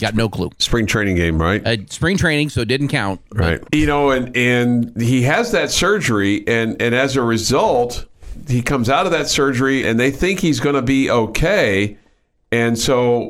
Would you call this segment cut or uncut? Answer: cut